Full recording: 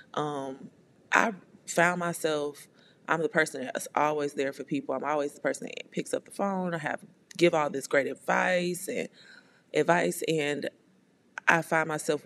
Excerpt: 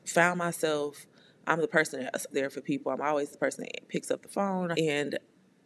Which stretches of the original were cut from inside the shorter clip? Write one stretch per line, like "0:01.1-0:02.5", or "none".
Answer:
0:03.9-0:04.3
0:06.8-0:10.3